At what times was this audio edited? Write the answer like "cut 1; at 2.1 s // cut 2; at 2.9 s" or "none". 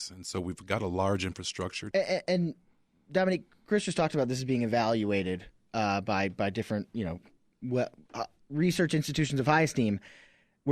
cut 1; at 1.9 s